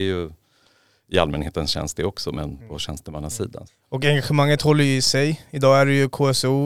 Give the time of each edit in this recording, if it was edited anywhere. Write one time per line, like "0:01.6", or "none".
0:03.7